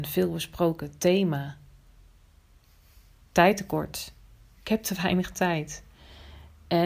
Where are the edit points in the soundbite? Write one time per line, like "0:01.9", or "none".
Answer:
none

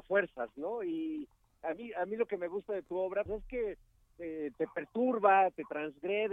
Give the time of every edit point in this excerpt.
0:03.3
0:04.5

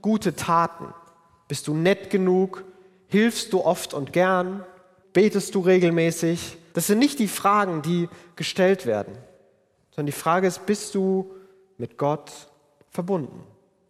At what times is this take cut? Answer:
0:05.0
0:06.7

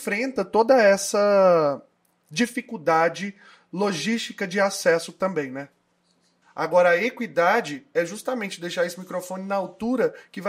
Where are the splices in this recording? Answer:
0:06.4

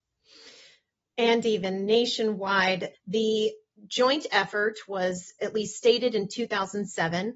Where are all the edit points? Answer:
0:02.9

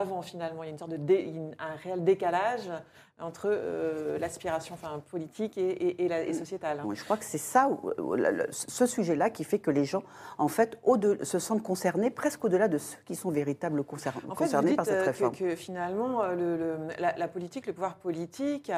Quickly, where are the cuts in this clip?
0:06.8

